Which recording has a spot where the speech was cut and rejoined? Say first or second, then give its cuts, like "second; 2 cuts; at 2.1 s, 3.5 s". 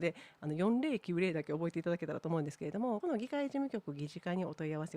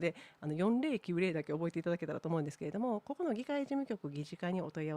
first; 1 cut; at 3.0 s